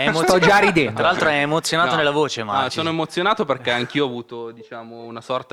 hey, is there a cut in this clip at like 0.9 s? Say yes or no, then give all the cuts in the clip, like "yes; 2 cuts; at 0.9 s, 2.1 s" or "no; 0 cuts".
no; 0 cuts